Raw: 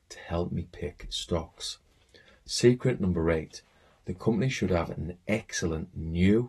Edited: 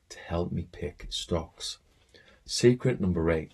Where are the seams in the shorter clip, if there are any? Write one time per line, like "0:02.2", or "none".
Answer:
none